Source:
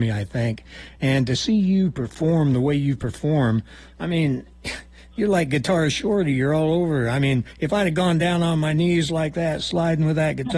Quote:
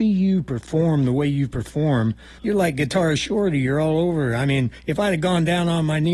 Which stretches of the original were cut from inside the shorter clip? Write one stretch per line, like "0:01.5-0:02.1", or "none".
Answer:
0:03.9-0:05.1